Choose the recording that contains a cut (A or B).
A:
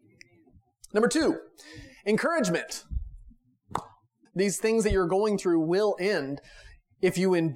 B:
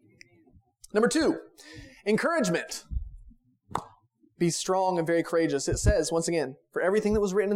A